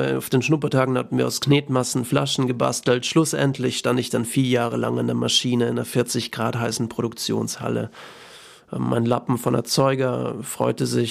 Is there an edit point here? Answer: no; 0 cuts

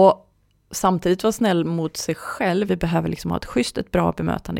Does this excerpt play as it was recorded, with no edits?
no; 1 cut; at 2.7 s

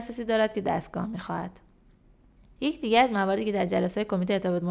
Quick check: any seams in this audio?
no; 0 cuts

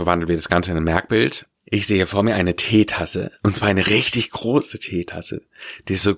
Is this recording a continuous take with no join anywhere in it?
no; 1 cut; at 1.5 s

